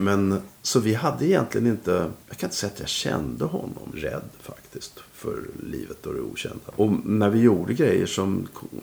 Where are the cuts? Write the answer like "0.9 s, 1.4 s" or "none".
2.2 s, 3.9 s, 6.7 s